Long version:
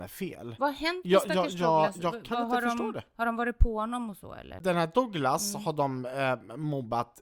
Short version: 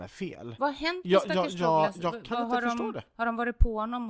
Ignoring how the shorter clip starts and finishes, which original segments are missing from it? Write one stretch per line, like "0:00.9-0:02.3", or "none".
none